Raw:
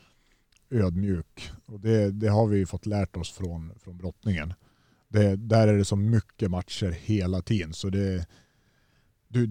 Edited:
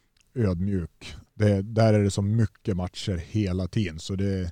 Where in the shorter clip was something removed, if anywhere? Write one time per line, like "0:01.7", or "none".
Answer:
0:01.3